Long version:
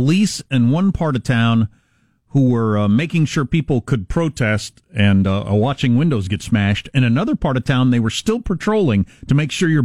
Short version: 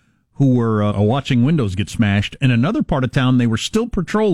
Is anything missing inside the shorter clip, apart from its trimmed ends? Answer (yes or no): yes